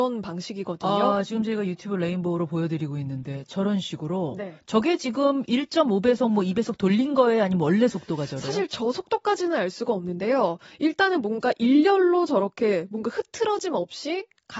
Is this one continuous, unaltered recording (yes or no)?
yes